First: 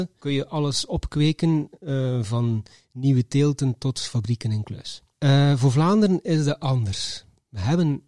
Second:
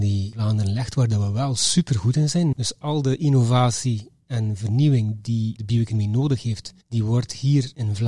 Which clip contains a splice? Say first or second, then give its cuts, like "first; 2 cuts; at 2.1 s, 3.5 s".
second; 2 cuts; at 2.5 s, 6.8 s